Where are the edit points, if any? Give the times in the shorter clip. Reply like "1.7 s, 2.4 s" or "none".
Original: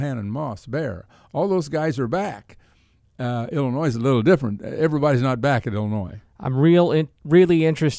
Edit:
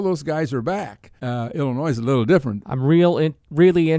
1.2 s, 2.6 s